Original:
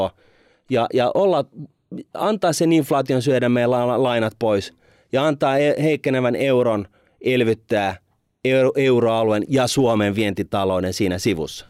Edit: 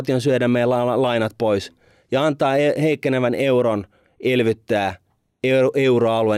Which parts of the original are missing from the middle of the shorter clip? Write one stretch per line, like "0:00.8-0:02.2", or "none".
none